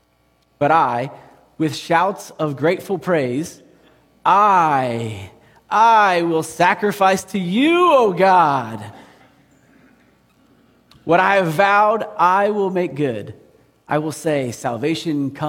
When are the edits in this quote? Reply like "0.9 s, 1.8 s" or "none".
none